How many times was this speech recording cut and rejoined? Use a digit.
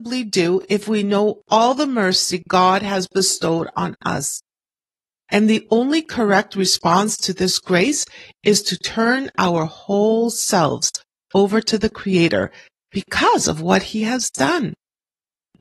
1